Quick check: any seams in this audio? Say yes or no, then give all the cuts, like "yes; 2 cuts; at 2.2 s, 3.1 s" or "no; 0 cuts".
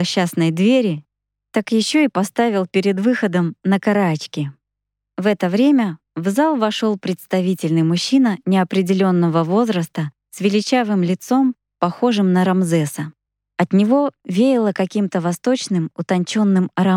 no; 0 cuts